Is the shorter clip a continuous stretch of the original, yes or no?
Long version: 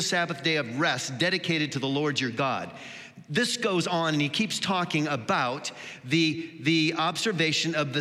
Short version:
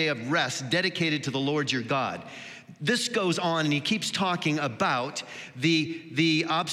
yes